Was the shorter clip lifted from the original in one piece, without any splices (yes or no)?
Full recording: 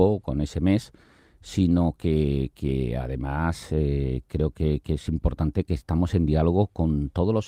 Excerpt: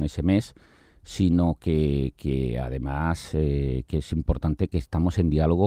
no